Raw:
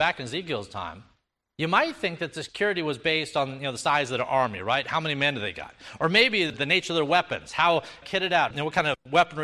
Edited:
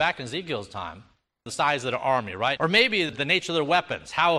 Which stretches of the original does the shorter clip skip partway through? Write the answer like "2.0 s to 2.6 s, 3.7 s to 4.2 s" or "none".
1.5 s to 3.7 s, 4.8 s to 6.0 s